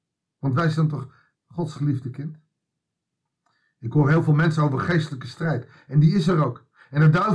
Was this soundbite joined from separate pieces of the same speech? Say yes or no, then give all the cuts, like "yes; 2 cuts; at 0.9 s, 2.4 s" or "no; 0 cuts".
yes; 1 cut; at 1.3 s